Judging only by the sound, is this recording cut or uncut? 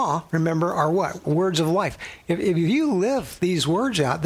cut